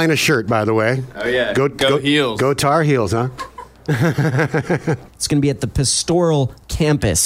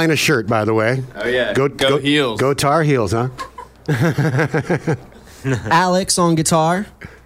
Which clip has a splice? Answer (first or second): first